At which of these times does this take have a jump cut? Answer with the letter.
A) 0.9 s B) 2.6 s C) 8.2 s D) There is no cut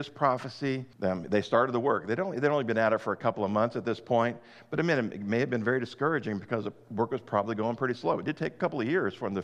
A